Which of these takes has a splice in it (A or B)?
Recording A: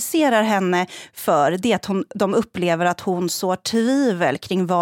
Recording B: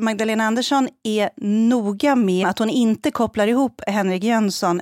B